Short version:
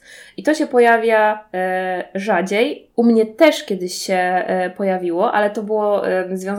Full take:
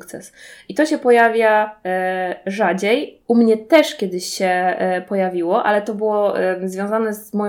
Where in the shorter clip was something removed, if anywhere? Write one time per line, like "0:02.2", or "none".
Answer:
none